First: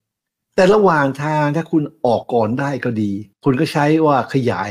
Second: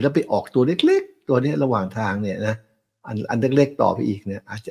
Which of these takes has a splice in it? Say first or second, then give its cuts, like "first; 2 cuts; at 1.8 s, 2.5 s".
first; 2 cuts; at 2.2 s, 3.3 s